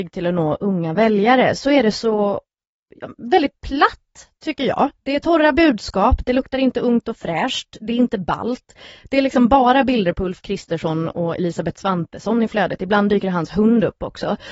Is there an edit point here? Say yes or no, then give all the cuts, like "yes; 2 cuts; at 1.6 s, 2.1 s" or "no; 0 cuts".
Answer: no; 0 cuts